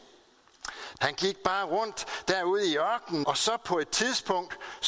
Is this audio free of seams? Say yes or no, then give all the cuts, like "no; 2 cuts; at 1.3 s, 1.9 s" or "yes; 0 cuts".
no; 2 cuts; at 1.0 s, 3.2 s